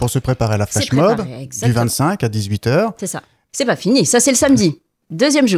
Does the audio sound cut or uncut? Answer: cut